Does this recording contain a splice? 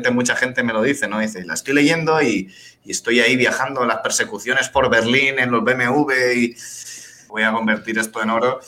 yes; 1 cut; at 7.3 s

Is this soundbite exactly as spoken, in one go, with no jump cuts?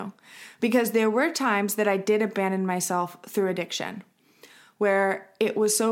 yes; 0 cuts

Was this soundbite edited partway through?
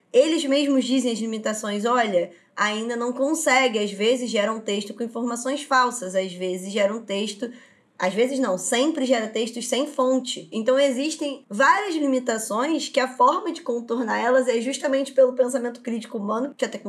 yes; 1 cut; at 10.5 s

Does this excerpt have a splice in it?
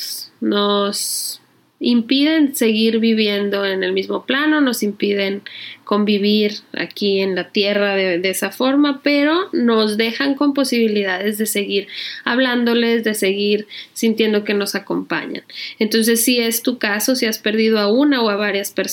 no; 0 cuts

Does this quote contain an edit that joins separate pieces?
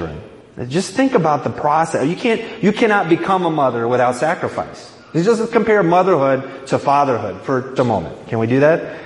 yes; 1 cut; at 7.8 s

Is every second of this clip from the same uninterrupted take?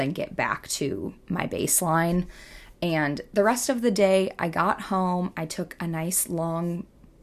yes; 0 cuts

